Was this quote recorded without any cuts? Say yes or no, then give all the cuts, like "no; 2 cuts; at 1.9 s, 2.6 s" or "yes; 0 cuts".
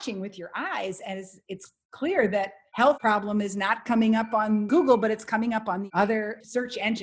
yes; 0 cuts